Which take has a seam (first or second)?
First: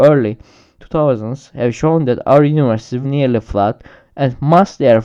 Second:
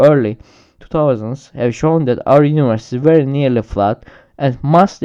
first